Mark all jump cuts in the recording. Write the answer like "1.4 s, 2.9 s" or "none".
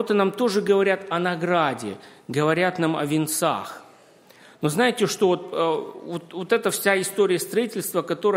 none